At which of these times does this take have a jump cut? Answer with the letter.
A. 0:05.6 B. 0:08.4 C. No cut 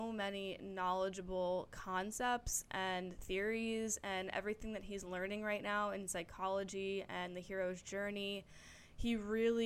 C